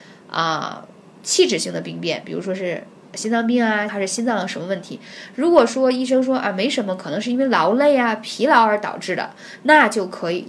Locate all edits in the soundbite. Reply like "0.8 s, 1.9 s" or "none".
3.9 s

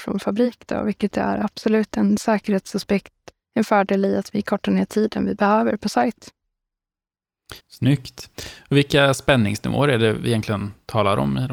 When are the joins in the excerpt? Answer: 3.3 s, 7.6 s

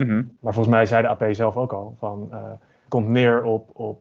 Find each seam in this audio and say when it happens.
2.8 s

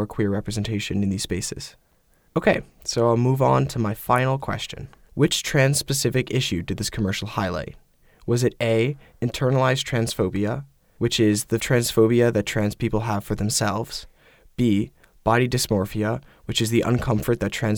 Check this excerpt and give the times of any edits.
5.1 s

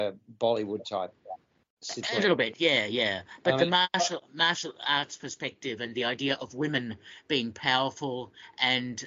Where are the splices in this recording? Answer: none

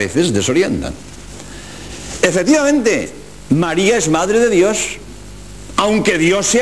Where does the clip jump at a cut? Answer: none

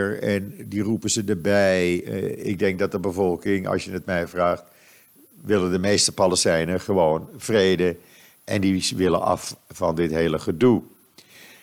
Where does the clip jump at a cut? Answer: 2.0 s

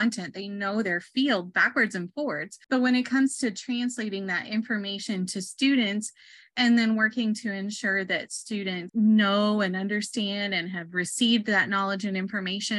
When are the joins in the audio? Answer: 2.6 s, 8.9 s

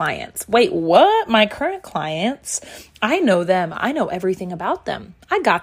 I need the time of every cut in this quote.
none

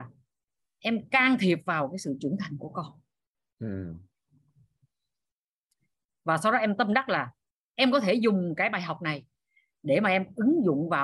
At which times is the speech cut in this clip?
none

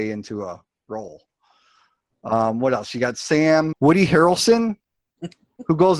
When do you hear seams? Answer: 3.7 s

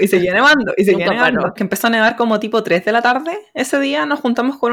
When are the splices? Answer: 1.6 s

